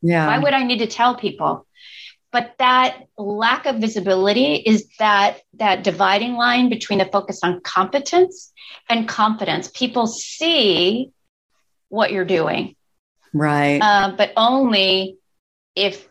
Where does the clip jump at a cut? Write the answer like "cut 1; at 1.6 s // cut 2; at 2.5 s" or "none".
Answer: none